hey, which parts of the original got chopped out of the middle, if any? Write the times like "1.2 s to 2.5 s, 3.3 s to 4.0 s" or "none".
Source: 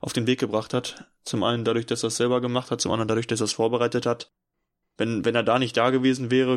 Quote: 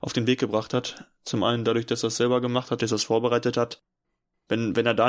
2.8 s to 3.3 s

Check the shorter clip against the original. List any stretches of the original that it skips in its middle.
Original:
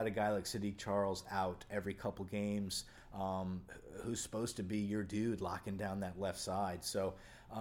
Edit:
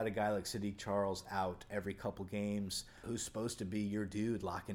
3.0 s to 4.0 s

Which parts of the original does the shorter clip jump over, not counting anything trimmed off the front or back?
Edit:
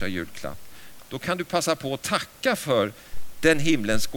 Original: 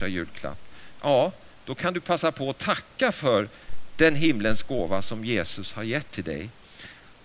1.0 s to 1.6 s

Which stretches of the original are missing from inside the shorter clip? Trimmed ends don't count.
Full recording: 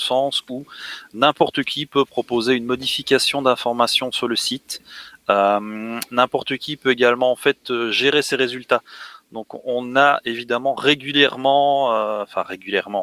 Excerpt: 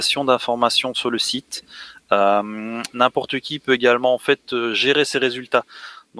none

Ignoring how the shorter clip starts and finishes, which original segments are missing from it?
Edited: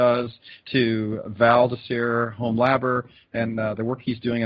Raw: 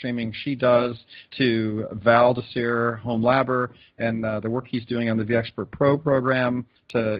none

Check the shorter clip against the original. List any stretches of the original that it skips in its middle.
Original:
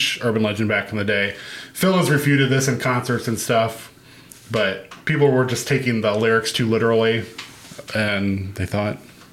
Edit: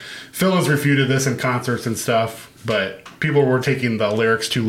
4.0 s to 4.4 s, 5.5 s to 5.6 s

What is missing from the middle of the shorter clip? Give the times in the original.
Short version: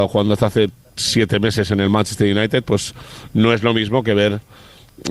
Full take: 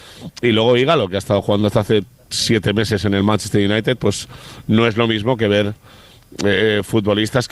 none

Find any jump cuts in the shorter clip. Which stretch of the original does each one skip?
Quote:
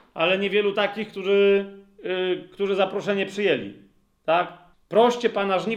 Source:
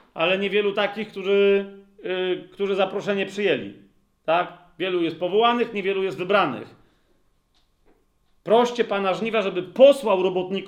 4.7 s to 8.3 s

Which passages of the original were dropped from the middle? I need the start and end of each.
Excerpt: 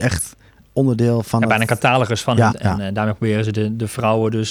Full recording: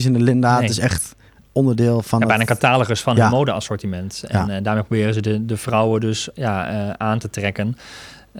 3.3 s to 4.2 s

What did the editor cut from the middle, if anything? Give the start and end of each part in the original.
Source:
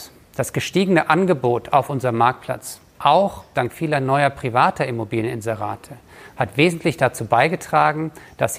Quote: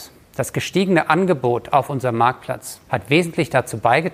2.9 s to 6.3 s

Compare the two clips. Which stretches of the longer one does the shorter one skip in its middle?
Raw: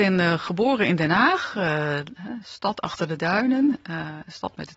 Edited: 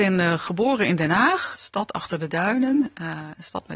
1.5 s to 2.4 s

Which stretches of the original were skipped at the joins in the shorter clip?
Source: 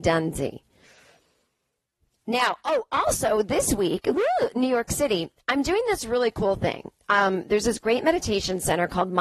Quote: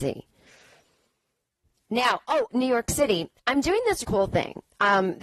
2.9 s to 4.5 s, 6.0 s to 6.3 s

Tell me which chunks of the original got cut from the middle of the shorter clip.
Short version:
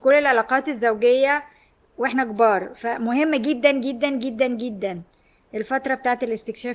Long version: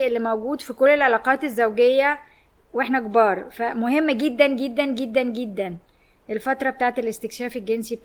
none

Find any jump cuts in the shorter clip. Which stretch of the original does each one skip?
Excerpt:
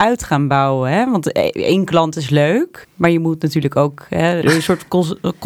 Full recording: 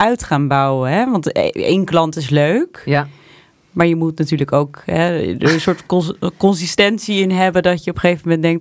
2.8 s to 3.6 s, 5.2 s to 5.4 s

